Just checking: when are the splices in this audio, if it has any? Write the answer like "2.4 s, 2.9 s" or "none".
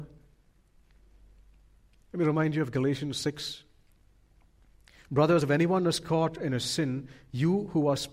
none